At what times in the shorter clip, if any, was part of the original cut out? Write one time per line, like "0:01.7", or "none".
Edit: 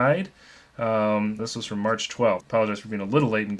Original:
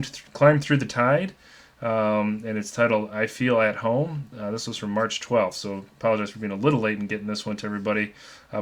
0:01.4
0:02.4